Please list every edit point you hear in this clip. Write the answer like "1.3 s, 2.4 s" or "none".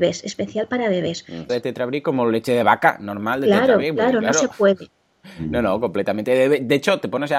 1.5 s